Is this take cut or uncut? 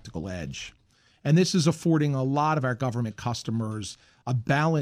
uncut